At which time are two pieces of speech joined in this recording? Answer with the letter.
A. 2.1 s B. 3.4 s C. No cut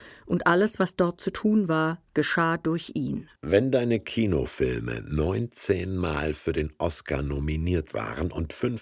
B